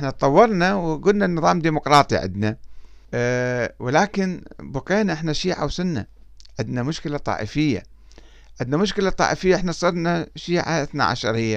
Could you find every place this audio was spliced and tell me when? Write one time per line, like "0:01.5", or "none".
0:03.1